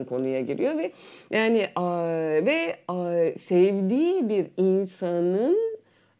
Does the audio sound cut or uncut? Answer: uncut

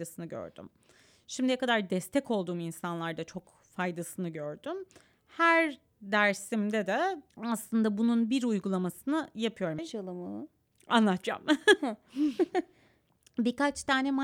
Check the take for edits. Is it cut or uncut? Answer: cut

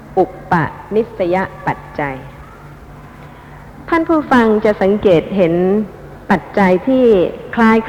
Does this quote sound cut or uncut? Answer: uncut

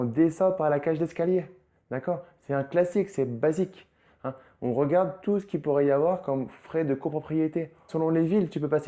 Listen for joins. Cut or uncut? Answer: cut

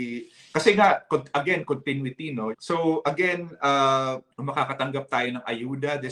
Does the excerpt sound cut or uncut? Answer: cut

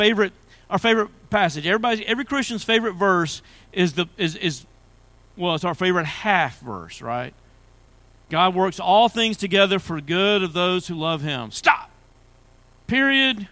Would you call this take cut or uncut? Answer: uncut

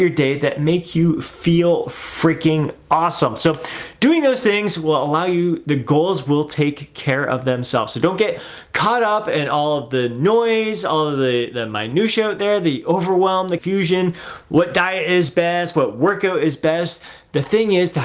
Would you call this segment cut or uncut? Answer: cut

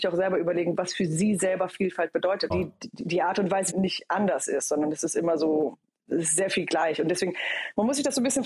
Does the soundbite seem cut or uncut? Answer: cut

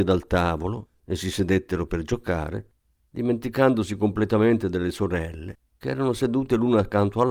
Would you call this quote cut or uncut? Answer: cut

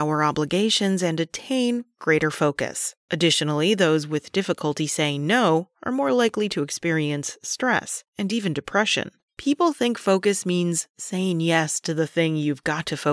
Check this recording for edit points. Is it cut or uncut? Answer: cut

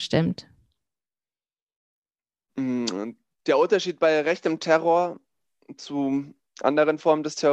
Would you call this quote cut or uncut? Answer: uncut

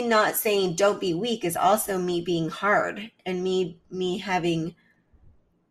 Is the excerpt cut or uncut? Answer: uncut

